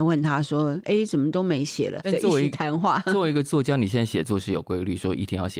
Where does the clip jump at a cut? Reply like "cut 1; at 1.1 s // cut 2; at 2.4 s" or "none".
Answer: cut 1; at 2.0 s